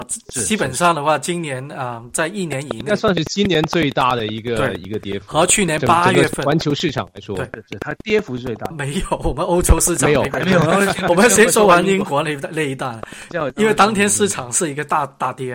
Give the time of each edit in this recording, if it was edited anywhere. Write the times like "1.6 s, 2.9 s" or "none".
8.7 s